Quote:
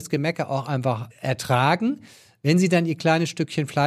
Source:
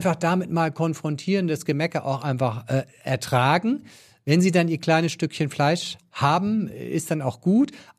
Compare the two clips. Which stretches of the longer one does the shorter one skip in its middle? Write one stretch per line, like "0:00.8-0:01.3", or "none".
0:02.7-0:02.9